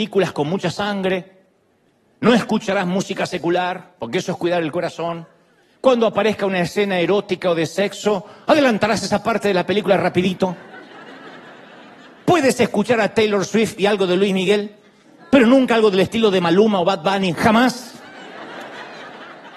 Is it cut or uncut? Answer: uncut